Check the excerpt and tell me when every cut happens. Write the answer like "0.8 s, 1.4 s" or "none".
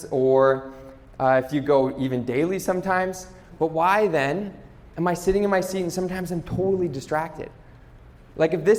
3.6 s